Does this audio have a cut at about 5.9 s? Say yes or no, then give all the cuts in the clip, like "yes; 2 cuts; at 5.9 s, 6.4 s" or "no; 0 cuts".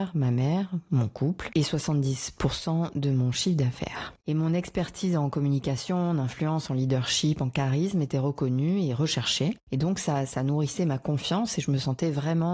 no; 1 cut; at 4.2 s